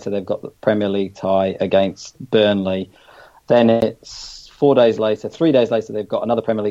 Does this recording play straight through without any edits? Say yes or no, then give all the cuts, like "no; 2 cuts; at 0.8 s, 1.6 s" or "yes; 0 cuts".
yes; 0 cuts